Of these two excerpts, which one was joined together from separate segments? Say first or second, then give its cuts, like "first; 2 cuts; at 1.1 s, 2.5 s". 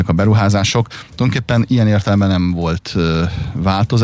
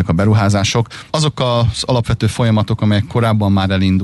second; 1 cut; at 1.1 s